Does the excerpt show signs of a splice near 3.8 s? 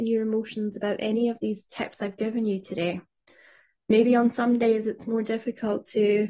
no; 0 cuts

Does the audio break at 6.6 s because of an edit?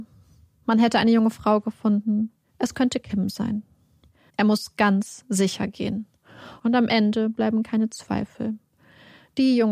yes; 2 cuts; at 4.3 s, 6.6 s

